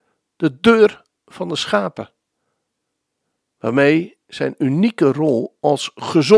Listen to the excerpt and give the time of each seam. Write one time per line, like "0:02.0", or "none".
none